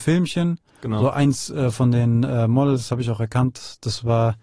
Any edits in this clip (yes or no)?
no